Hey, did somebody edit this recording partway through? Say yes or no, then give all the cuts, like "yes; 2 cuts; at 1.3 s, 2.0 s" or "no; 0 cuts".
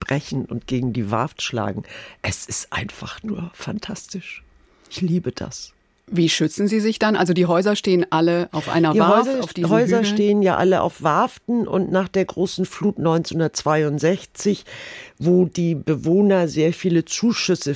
no; 0 cuts